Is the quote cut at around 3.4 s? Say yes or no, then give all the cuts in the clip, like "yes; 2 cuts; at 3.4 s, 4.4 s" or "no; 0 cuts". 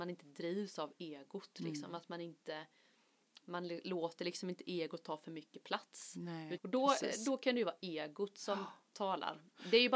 no; 1 cut; at 6.6 s